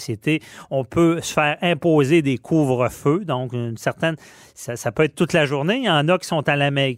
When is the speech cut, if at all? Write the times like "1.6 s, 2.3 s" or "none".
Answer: none

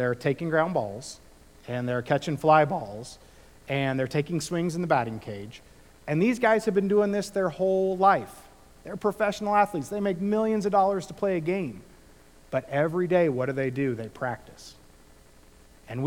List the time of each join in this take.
none

